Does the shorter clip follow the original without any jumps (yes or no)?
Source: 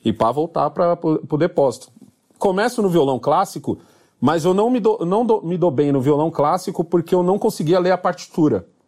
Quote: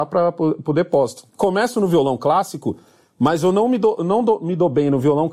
no